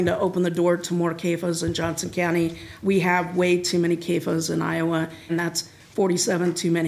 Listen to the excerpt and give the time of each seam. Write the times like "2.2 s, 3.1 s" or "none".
2.8 s, 5.3 s